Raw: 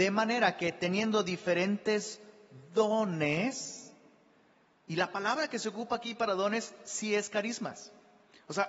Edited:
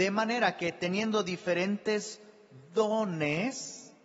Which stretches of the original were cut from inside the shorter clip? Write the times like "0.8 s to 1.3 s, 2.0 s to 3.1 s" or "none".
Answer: none